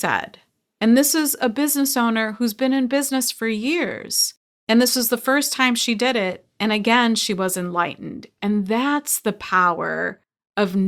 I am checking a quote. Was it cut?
no; 0 cuts

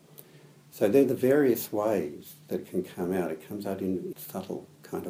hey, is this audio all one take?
no; 1 cut; at 4.1 s

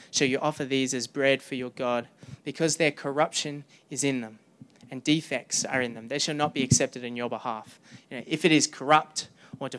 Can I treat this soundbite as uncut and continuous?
yes; 0 cuts

